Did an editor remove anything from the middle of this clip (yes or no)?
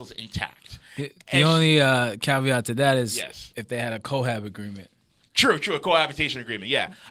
no